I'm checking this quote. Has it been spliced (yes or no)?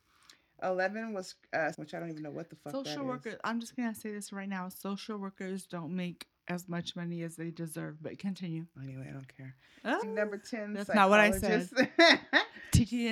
yes